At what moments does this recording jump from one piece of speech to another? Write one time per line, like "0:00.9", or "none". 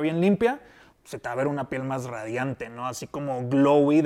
0:00.9

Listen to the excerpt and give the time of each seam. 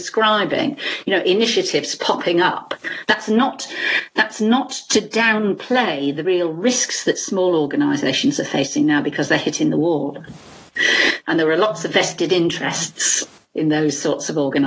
0:06.2
0:11.2

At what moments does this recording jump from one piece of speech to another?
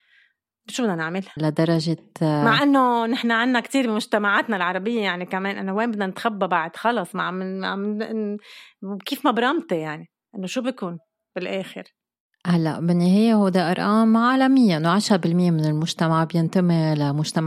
0:01.4

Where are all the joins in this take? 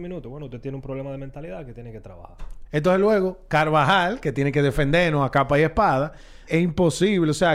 0:02.7
0:06.5

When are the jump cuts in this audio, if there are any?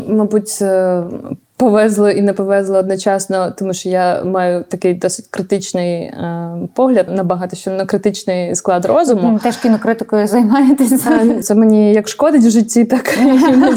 0:07.1
0:11.4

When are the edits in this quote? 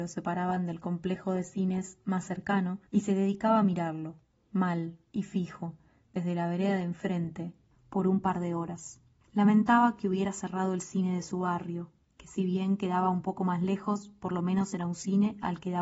0:02.9

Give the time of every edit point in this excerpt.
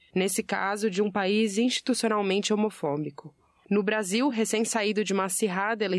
none

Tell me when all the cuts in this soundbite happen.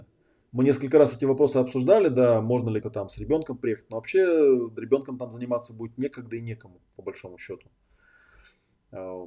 0:02.8

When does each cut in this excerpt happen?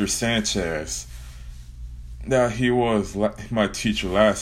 none

